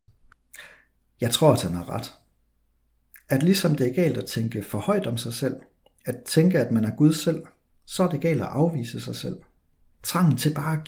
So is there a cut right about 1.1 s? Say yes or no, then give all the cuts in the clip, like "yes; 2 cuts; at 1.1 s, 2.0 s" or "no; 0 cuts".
no; 1 cut; at 9.9 s